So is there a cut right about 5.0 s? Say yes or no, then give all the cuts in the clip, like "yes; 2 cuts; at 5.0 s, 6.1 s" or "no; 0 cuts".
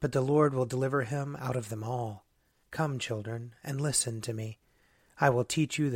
no; 1 cut; at 2.6 s